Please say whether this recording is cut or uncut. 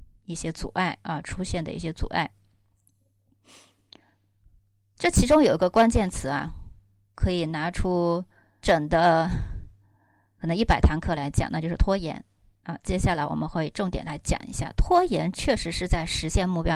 cut